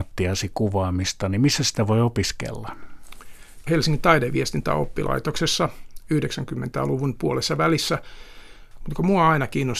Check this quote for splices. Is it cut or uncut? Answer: cut